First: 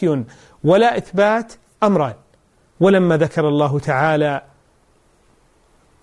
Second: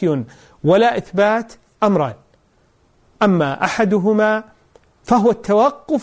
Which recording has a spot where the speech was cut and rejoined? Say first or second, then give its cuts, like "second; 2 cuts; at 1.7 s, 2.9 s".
first; 1 cut; at 2.7 s